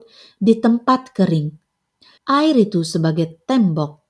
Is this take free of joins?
no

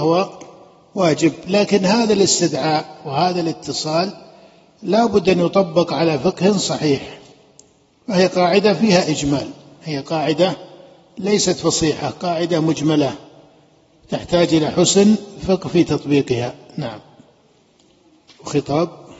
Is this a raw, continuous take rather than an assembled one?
yes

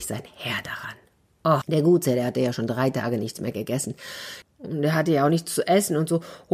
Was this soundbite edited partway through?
yes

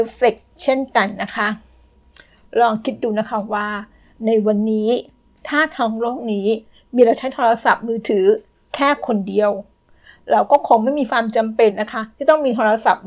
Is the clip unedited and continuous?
yes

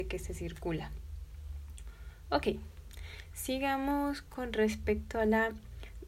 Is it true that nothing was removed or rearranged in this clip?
yes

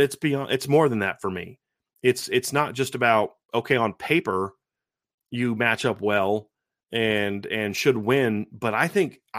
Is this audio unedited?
yes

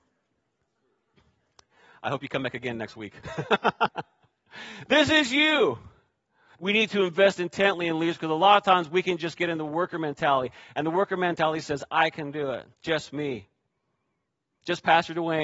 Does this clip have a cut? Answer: yes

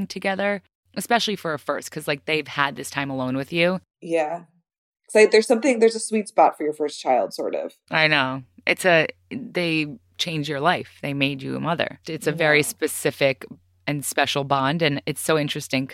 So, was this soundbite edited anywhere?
yes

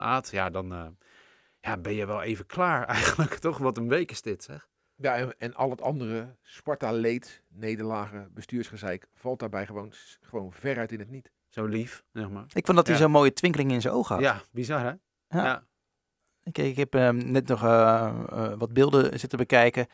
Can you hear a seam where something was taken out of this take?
yes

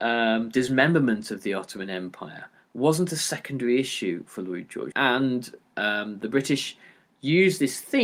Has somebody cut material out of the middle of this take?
yes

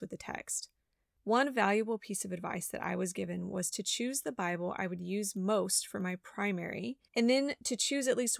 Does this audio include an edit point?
yes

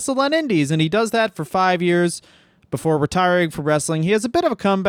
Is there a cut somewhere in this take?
no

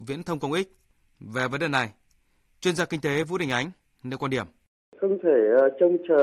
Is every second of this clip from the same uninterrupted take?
yes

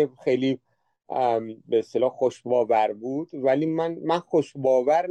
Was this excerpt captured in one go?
yes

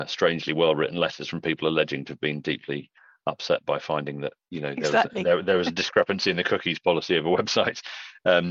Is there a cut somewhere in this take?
no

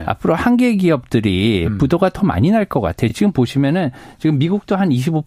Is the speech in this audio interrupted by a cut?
no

